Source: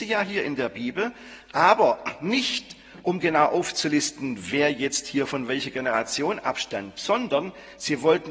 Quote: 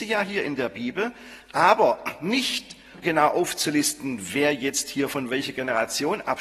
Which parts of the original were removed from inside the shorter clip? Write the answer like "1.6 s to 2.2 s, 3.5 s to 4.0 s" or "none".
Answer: 3.0 s to 3.2 s